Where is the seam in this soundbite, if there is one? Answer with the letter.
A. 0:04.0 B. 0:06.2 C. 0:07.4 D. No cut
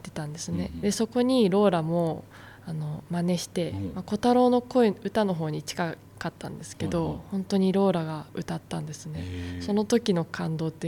D